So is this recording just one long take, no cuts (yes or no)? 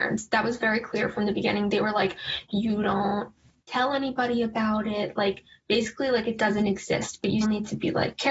no